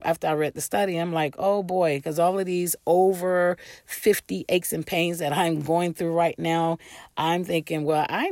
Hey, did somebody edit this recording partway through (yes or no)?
no